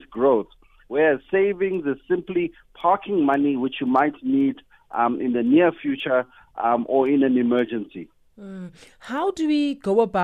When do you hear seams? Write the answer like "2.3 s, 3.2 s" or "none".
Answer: none